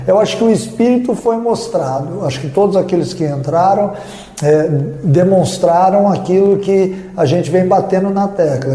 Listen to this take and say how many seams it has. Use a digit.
0